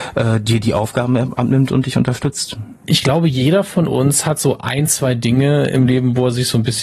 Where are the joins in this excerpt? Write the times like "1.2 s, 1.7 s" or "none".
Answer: none